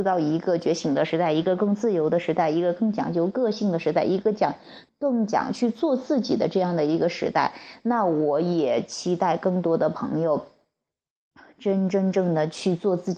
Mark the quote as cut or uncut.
cut